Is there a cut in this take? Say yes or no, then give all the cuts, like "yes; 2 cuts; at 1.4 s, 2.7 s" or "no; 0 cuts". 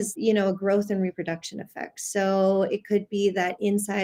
no; 0 cuts